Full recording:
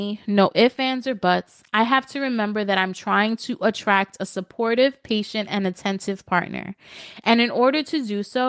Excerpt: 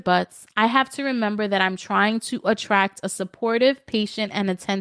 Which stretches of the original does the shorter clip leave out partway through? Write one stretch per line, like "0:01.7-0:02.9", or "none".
none